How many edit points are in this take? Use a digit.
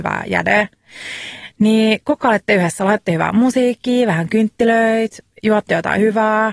0